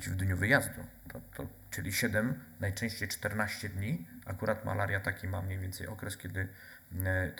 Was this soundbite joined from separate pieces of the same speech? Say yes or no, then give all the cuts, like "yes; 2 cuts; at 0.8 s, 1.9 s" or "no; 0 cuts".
no; 0 cuts